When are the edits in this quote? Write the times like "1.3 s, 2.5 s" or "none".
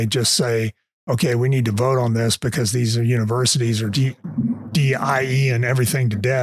3.9 s